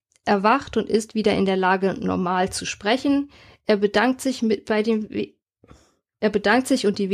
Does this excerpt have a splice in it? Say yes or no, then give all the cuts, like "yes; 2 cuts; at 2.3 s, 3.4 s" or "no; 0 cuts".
no; 0 cuts